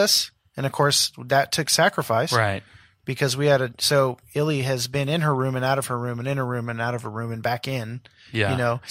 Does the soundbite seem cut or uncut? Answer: uncut